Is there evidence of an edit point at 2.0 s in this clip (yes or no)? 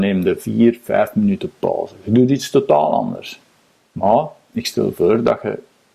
no